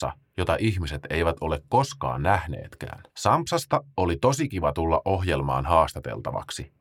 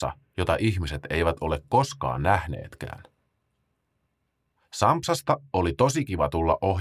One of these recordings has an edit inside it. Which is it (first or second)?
first